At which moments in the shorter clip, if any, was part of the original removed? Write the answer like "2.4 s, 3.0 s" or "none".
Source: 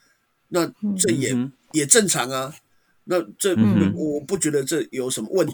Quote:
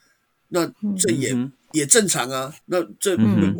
2.6 s